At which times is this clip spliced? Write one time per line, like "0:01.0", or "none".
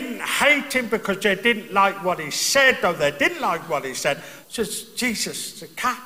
0:04.4